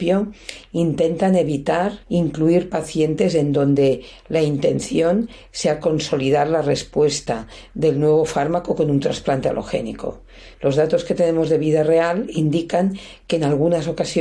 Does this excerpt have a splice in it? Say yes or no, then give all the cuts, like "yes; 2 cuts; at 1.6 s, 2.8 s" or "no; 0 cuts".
yes; 2 cuts; at 2.0 s, 10.5 s